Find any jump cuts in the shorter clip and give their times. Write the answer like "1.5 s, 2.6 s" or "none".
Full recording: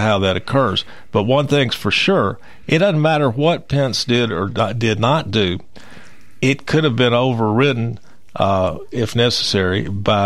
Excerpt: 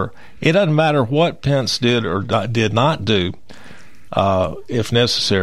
4.1 s